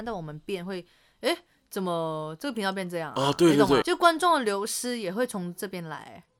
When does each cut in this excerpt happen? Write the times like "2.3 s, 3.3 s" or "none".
3.8 s

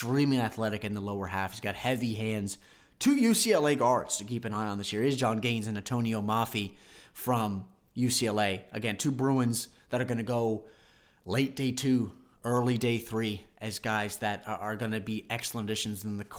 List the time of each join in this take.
none

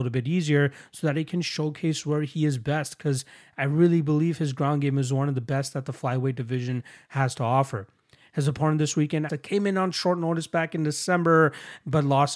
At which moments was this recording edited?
9.3 s

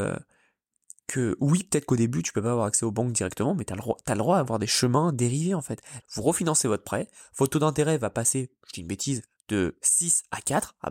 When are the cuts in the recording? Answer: 6.0 s

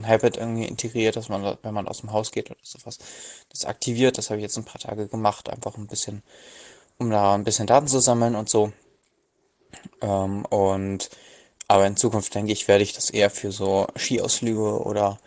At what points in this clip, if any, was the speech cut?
none

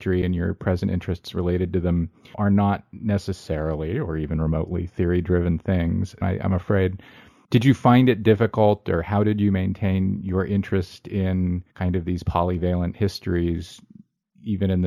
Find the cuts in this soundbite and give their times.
6.2 s, 11.7 s

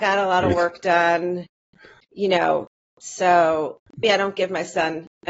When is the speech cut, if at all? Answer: 4.0 s

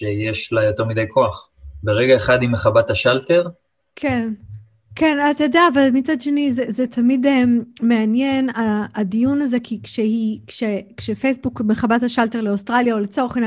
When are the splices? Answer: none

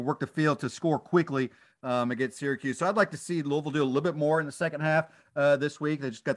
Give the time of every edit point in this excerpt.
none

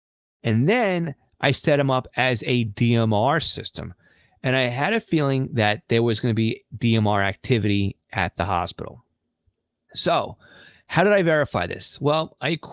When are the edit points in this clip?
none

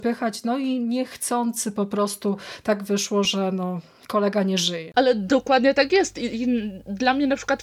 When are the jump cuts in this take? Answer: none

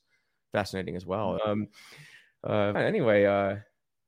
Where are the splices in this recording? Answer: 1.4 s, 2.8 s

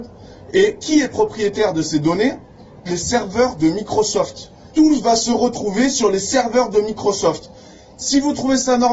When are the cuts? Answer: none

